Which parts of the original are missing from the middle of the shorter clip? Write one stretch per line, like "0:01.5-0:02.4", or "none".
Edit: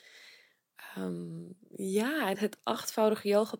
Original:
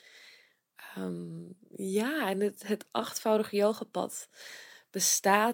0:02.3-0:02.6